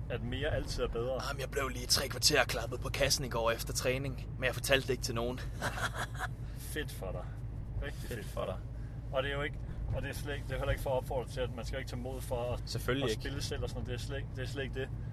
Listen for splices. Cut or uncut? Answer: cut